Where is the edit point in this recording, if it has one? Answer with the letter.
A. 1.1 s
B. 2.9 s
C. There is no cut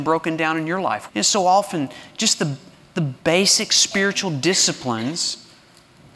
A